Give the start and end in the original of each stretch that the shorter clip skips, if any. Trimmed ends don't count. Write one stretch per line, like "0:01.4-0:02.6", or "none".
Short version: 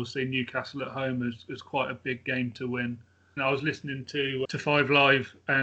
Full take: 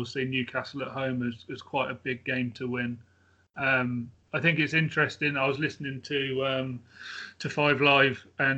0:03.4-0:05.3
0:06.4-0:07.4